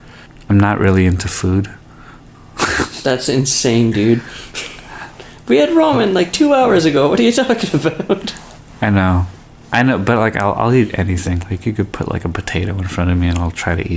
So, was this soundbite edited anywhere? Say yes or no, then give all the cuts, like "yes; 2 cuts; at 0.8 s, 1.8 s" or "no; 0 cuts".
no; 0 cuts